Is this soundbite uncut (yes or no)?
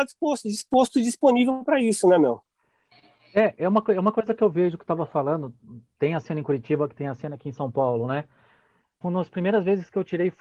no